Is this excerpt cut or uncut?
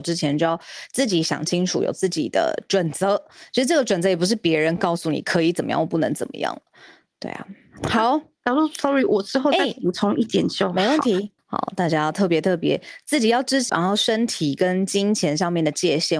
cut